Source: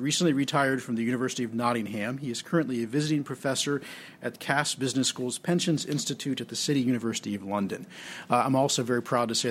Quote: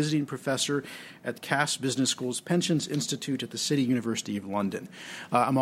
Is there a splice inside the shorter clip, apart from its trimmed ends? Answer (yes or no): no